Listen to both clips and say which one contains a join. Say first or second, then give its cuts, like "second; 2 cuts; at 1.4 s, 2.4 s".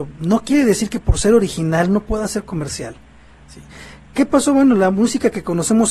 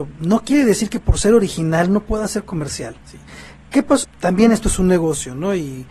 second; 2 cuts; at 3.0 s, 4.0 s